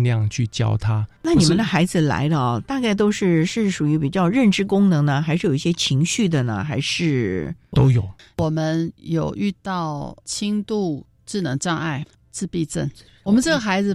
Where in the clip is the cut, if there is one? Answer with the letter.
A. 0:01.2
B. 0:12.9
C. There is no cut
C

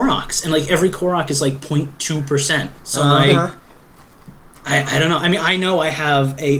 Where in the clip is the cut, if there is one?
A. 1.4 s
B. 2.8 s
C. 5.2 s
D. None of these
B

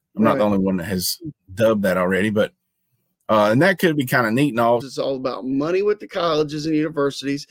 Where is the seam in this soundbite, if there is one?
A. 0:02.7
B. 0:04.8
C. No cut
B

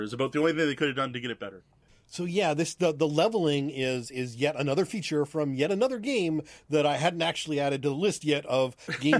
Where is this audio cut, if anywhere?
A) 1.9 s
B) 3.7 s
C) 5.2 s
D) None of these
A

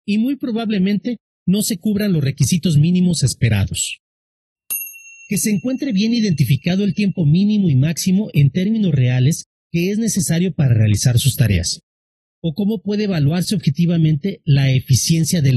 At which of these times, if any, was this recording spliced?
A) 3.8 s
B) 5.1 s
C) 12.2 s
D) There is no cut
C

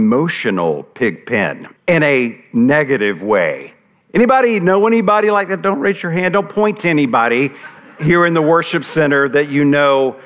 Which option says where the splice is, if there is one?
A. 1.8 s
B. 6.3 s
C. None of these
A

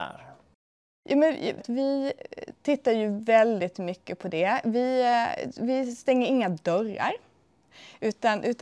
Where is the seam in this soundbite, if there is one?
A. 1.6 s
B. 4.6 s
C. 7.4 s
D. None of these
A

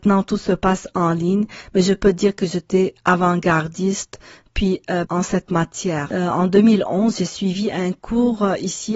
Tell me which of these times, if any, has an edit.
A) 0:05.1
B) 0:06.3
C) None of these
A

